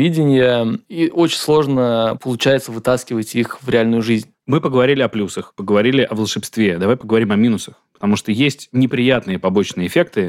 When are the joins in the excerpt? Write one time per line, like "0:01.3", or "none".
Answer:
0:04.3